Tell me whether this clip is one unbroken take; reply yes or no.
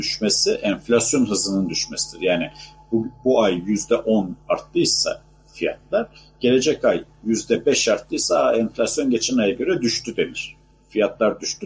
yes